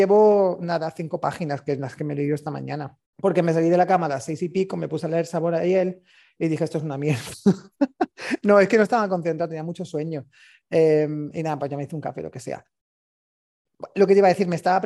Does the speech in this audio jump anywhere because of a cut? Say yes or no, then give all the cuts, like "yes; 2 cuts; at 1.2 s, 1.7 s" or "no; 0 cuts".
yes; 1 cut; at 3.1 s